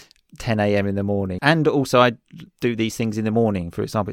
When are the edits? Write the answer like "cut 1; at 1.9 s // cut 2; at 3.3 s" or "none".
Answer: cut 1; at 1.4 s